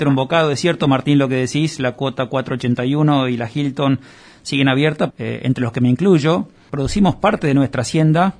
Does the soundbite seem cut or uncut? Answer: cut